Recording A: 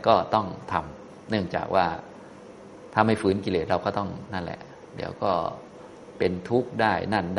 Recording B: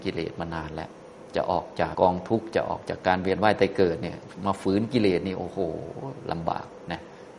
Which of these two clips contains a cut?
B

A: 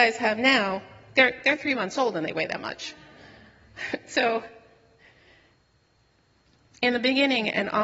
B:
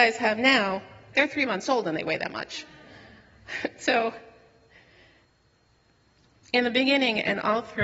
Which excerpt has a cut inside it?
B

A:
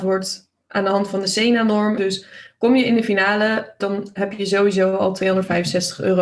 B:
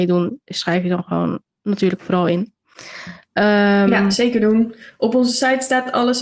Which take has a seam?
A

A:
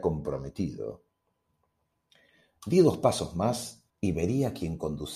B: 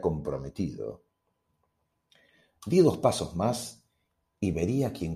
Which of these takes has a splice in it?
A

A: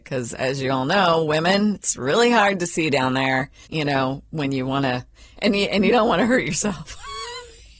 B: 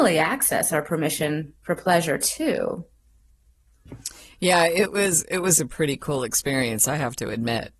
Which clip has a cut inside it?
A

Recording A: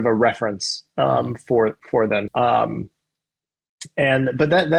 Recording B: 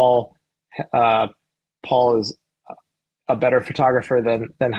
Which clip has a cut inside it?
A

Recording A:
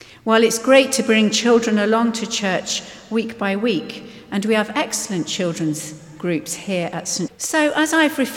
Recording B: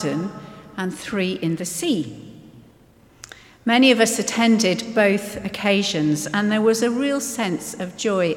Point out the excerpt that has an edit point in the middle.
A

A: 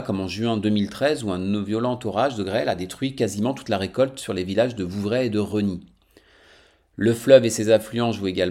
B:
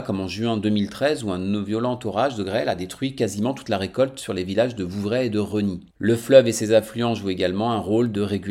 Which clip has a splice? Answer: B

